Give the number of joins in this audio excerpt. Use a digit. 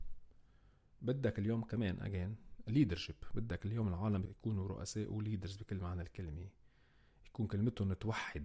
1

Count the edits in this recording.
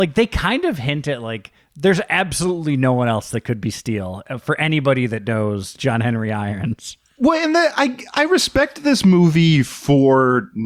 0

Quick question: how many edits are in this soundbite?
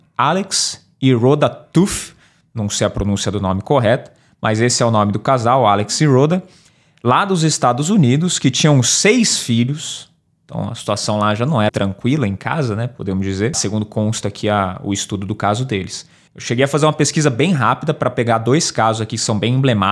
3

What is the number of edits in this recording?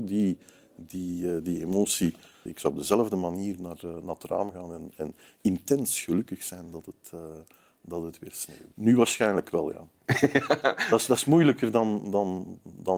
2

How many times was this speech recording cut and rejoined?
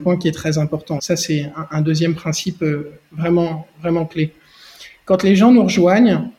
1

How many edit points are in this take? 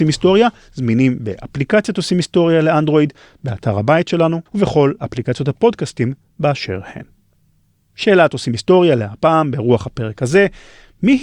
1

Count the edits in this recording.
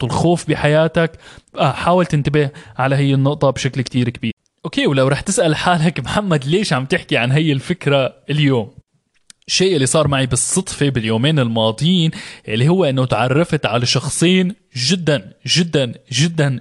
0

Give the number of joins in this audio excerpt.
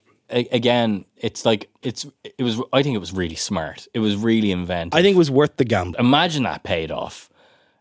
2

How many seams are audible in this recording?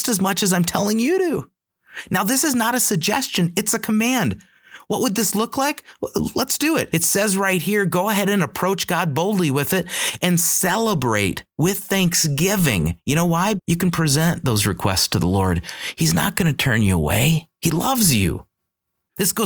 2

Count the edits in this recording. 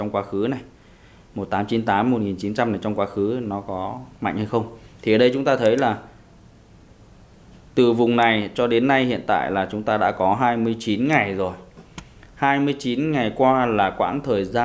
0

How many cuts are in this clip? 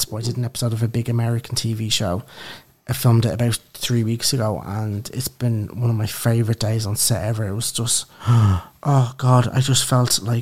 0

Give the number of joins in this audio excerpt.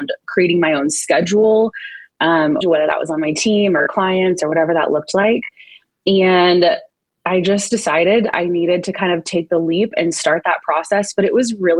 1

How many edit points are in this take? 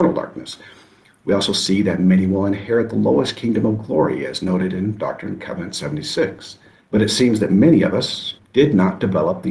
2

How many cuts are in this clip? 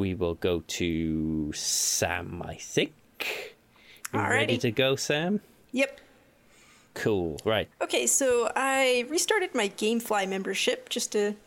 1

